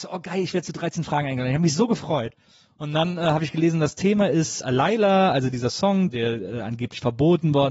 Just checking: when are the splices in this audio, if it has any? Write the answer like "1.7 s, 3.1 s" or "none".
4.6 s, 6.1 s